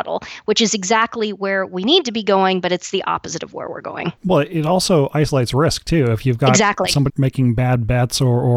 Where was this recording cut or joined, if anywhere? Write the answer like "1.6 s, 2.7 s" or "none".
4.2 s, 7.1 s